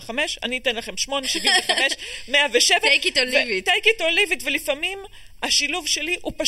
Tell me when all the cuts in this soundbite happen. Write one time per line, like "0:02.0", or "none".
0:01.2